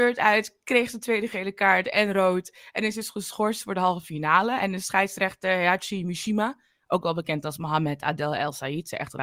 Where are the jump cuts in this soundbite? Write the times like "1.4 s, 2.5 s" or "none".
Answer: none